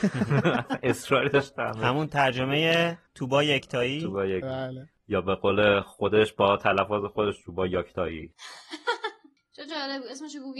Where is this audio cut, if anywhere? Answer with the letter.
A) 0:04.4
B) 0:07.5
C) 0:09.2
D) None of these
A